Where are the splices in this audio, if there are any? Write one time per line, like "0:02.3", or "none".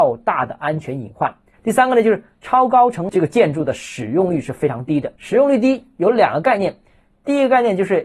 0:01.5
0:05.2